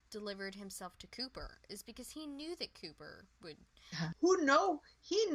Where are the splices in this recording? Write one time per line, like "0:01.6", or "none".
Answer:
0:04.1